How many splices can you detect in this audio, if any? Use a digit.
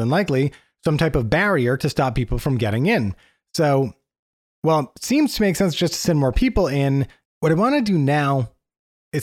1